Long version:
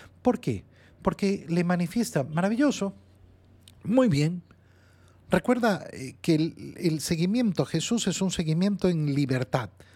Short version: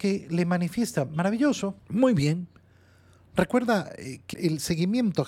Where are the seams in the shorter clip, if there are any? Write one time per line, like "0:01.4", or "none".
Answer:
0:01.8
0:04.3